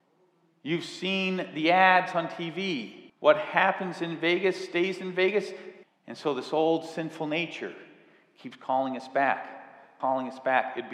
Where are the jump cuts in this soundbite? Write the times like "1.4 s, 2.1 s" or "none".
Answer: 3.1 s, 5.8 s, 10.0 s